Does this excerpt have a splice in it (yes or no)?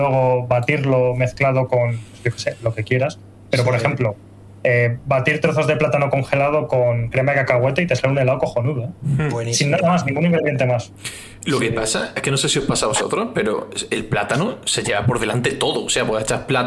no